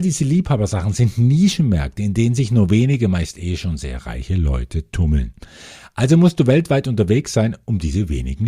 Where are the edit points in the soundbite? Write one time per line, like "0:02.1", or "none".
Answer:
none